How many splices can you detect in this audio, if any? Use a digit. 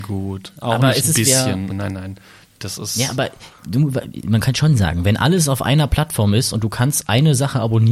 1